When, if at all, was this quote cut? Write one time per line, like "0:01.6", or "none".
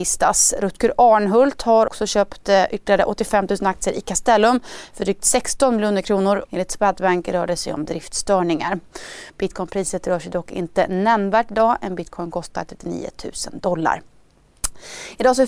0:01.9
0:06.5
0:09.3